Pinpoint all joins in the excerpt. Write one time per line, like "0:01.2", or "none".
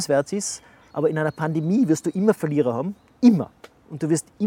0:00.9